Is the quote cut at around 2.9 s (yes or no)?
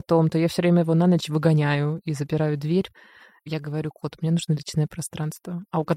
no